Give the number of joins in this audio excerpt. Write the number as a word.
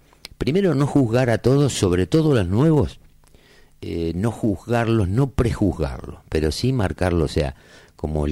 zero